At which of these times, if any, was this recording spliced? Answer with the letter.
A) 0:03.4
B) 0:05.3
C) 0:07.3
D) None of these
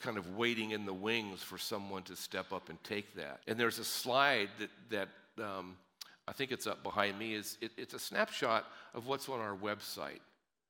A